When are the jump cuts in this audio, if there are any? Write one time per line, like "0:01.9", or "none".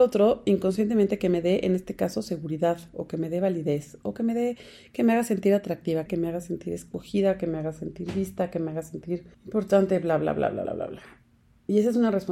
0:06.1
0:09.3
0:10.7